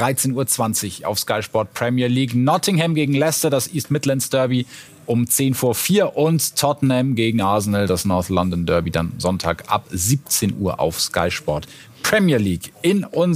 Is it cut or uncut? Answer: uncut